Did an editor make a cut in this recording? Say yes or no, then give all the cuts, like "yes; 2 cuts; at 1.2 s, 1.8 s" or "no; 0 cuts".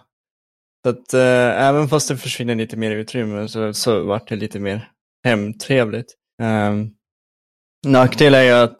yes; 2 cuts; at 3.7 s, 6.3 s